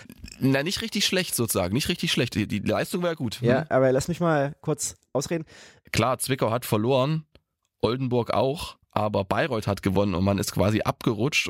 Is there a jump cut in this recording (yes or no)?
yes